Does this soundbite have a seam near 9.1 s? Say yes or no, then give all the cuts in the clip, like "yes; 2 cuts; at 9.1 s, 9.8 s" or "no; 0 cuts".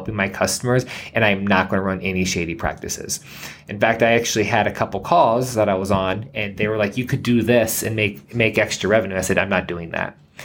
no; 0 cuts